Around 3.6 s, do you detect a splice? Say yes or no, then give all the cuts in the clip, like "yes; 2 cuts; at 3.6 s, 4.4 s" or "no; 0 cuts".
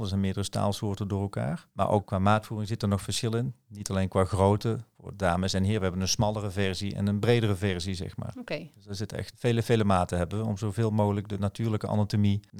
no; 2 cuts; at 4.9 s, 9.3 s